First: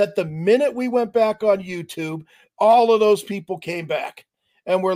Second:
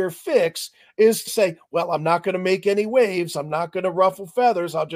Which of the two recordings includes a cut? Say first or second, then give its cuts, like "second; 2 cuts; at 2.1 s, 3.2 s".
second; 1 cut; at 1.3 s